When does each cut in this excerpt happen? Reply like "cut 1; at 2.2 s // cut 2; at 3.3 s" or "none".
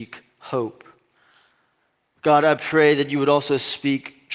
none